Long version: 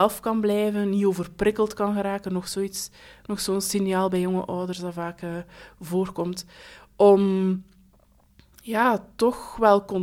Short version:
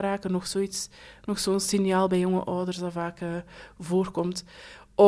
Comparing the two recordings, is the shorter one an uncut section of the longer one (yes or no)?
yes